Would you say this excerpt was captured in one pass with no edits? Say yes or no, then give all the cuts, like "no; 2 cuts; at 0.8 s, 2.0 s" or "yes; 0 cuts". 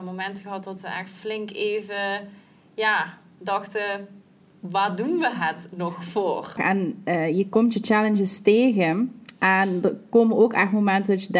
no; 1 cut; at 6.6 s